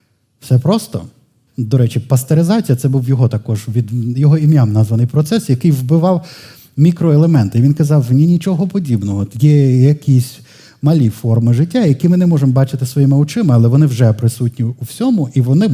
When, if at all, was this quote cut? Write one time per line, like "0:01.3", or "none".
0:01.5

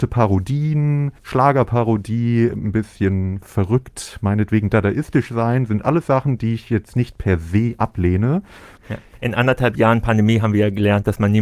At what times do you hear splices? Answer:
0:01.2
0:08.8

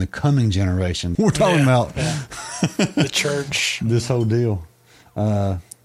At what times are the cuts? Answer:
0:01.1

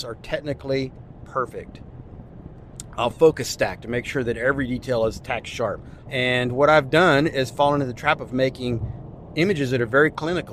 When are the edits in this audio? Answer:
0:06.0

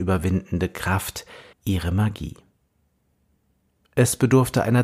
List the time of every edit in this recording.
0:01.5

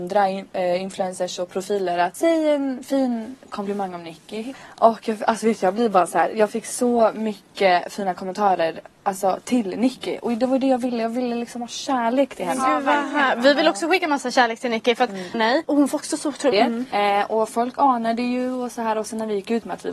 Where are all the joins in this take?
0:15.3
0:16.5

